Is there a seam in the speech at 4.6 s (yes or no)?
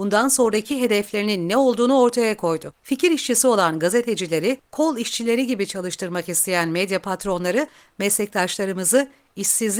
no